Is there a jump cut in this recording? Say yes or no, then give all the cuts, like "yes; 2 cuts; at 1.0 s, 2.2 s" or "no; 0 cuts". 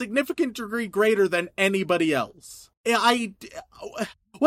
yes; 1 cut; at 2.7 s